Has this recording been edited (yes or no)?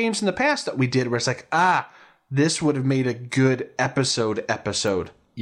no